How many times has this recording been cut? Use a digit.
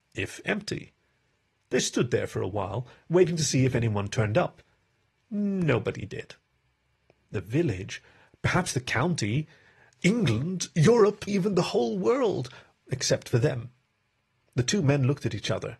2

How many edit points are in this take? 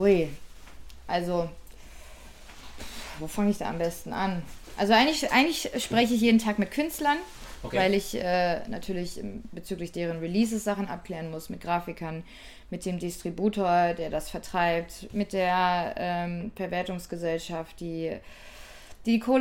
0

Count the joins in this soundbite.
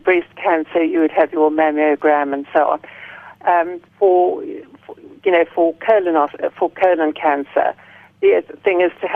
1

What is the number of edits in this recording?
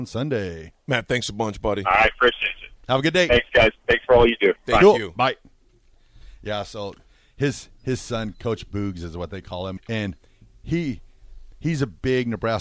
2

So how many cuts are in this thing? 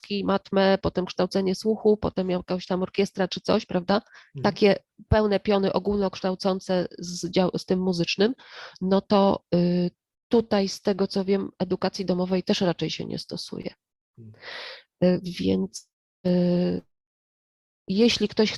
0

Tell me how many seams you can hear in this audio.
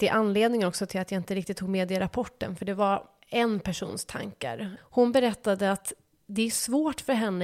1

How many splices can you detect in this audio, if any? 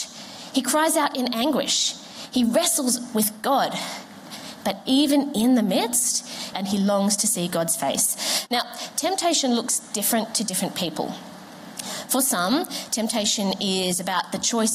2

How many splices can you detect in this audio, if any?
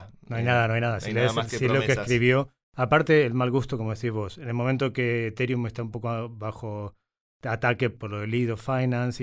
0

